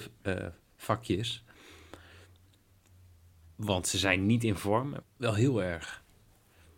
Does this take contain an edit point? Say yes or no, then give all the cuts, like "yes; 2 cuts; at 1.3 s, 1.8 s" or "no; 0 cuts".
yes; 1 cut; at 5.0 s